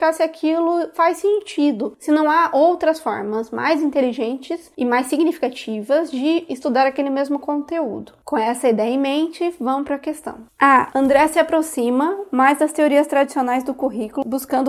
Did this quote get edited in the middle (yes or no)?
no